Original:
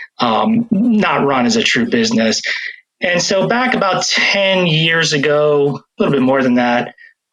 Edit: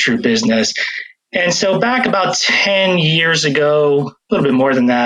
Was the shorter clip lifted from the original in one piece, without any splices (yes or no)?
yes